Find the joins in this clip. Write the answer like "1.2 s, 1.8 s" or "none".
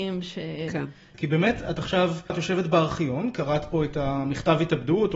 1.1 s, 2.3 s